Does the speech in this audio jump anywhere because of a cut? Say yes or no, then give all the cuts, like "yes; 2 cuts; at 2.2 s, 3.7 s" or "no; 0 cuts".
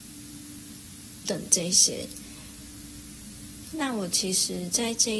yes; 2 cuts; at 1.2 s, 3.6 s